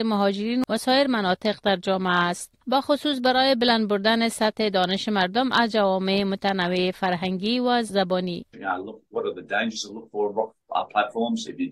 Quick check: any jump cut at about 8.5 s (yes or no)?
yes